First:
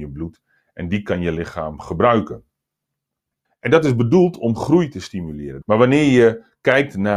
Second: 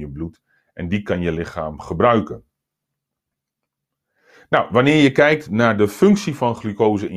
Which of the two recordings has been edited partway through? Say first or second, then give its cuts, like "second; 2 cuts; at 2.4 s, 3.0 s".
first; 2 cuts; at 3.4 s, 5.6 s